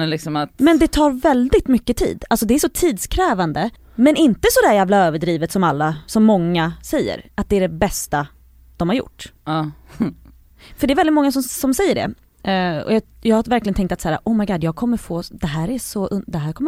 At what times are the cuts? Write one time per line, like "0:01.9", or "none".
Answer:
0:03.8